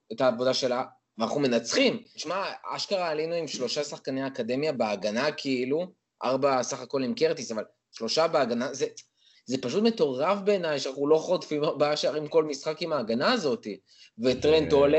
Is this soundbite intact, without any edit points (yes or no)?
no